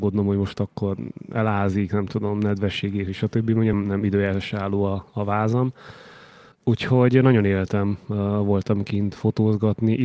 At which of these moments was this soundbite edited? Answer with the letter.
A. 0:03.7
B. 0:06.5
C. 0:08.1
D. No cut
A